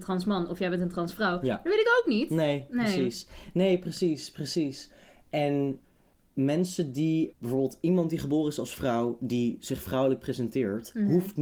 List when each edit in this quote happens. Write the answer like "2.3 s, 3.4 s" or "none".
7.3 s